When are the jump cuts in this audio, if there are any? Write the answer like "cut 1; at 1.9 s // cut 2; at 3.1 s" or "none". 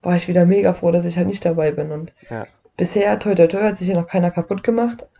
none